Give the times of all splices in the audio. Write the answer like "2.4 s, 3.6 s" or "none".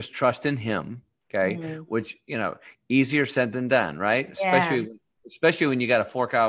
none